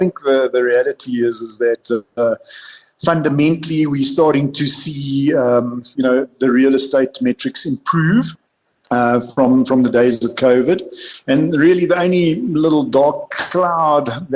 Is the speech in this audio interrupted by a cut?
no; 0 cuts

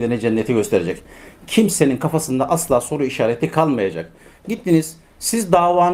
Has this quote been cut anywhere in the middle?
no; 0 cuts

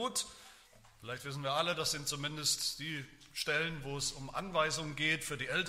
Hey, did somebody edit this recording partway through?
no; 0 cuts

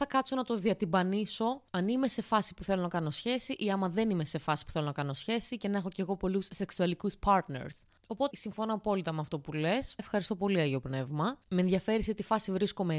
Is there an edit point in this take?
yes; 3 cuts; at 8.3 s, 10.0 s, 11.4 s

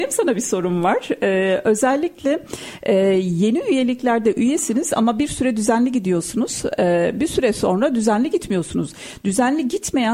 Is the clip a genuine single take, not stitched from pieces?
yes; 0 cuts

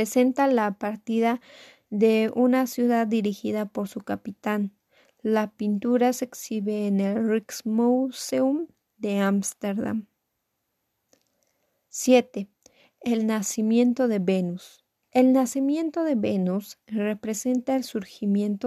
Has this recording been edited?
yes; 1 cut; at 15.0 s

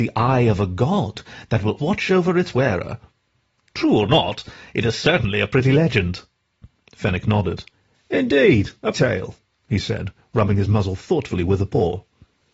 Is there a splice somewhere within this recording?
yes; 2 cuts; at 1.8 s, 8.9 s

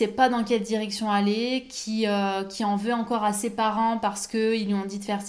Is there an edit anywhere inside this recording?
no; 0 cuts

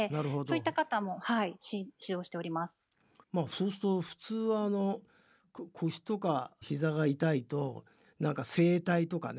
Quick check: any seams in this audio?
yes; 2 cuts; at 3.2 s, 6.6 s

